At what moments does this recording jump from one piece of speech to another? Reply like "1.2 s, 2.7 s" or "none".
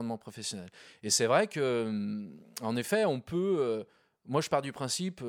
none